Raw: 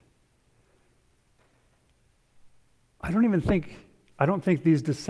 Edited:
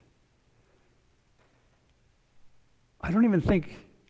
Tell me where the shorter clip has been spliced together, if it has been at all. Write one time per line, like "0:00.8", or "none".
none